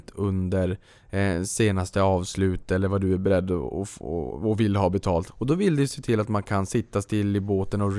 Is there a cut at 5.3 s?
yes; 1 cut; at 5.3 s

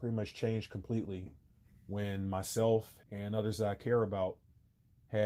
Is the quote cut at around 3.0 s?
yes; 1 cut; at 3.0 s

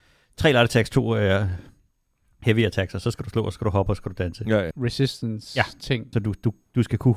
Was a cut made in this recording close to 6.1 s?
yes; 2 cuts; at 4.7 s, 6.1 s

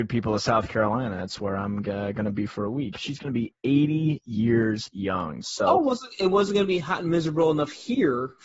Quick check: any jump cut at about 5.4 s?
yes; 2 cuts; at 2.9 s, 5.4 s

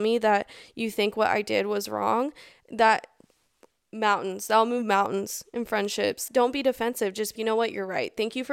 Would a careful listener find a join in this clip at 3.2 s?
no; 2 cuts; at 6.3 s, 7.4 s

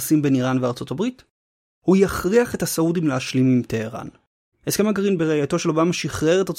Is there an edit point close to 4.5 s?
yes; 1 cut; at 4.5 s

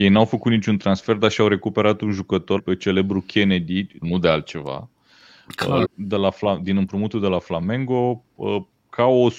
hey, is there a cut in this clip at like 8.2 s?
no; 3 cuts; at 2.6 s, 4.0 s, 5.8 s

